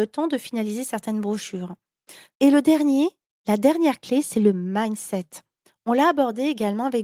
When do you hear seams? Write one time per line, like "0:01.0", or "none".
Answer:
0:02.3